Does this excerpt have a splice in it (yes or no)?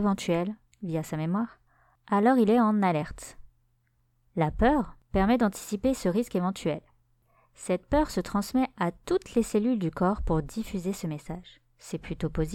no